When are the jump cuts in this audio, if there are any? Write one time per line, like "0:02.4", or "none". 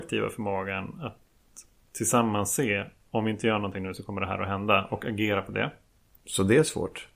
0:06.2